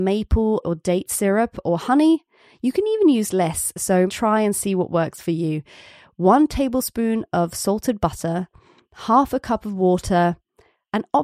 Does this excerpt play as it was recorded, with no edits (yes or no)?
no